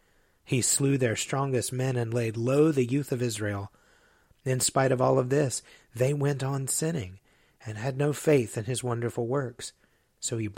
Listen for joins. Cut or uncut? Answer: uncut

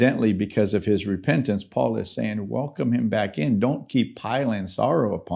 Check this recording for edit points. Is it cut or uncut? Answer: uncut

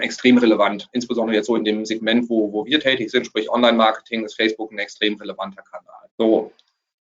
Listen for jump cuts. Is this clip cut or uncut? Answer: cut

